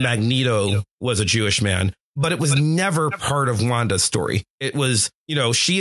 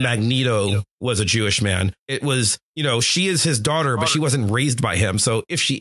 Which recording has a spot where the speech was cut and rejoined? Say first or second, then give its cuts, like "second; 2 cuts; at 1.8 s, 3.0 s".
second; 1 cut; at 2.0 s